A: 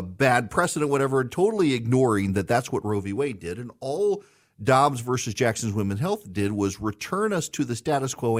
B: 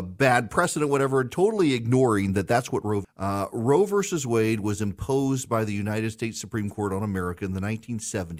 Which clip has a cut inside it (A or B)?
B